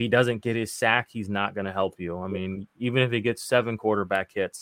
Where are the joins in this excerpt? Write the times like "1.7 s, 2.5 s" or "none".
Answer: none